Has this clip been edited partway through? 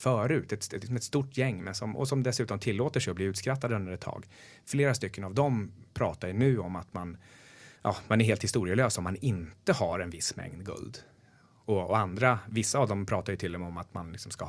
yes; 1 cut; at 7.8 s

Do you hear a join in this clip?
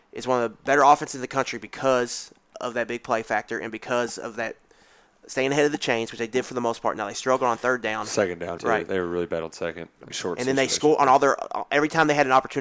yes; 2 cuts; at 8.6 s, 10.1 s

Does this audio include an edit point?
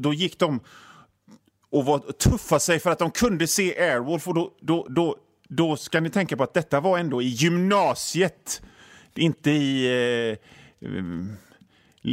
no; 0 cuts

